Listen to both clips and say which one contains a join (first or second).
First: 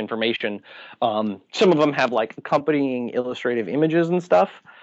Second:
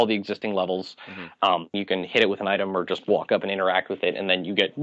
second